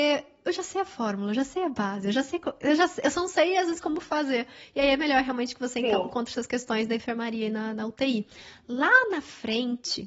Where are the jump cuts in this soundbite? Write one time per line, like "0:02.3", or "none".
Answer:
none